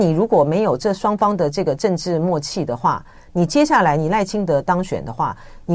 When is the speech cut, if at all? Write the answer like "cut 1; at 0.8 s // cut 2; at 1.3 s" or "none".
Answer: none